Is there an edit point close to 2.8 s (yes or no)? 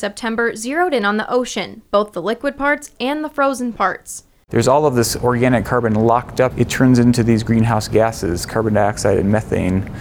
no